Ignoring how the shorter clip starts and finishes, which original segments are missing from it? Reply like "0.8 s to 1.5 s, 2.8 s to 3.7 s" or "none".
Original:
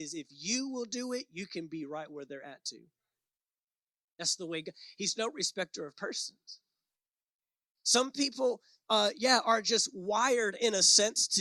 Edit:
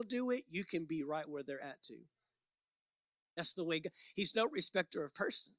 none